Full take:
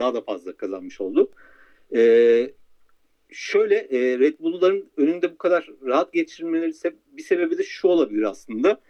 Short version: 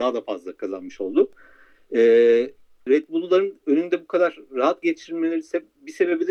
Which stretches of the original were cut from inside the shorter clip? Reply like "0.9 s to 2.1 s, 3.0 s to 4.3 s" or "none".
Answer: 2.9 s to 4.2 s